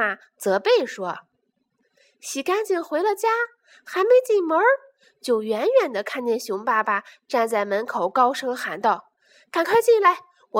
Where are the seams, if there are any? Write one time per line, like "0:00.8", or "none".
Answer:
none